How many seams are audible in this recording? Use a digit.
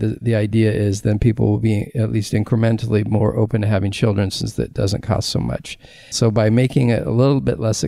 1